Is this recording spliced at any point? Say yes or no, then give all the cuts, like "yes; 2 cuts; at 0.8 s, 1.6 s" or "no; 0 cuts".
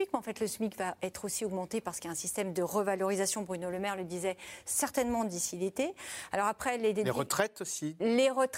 no; 0 cuts